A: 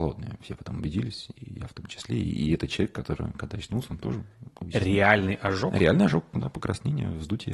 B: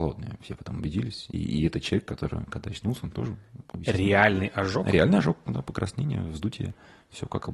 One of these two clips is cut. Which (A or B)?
B